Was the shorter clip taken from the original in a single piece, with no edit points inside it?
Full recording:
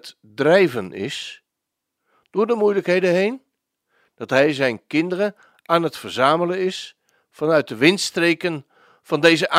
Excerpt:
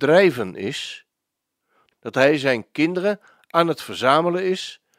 no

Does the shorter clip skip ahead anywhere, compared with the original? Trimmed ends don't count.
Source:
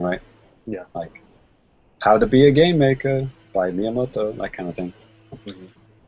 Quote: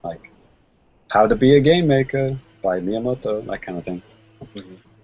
no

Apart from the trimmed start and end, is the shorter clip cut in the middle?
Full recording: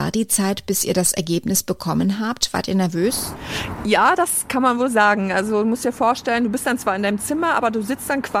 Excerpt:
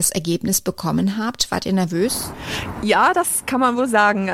no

